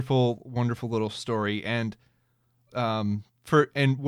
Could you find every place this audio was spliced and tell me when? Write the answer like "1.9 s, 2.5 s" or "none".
2.7 s